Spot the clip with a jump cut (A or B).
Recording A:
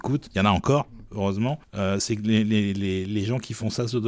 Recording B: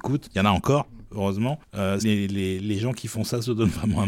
B